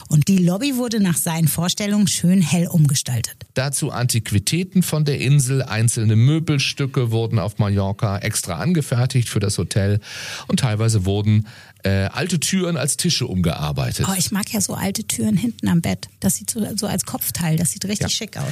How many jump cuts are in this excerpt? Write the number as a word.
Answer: one